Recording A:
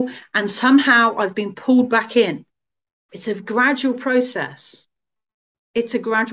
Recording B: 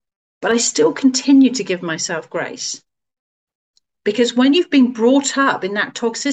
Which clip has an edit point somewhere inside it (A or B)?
A